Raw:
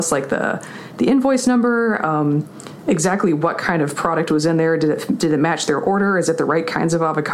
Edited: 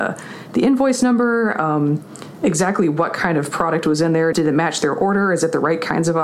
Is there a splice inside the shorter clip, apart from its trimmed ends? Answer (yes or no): yes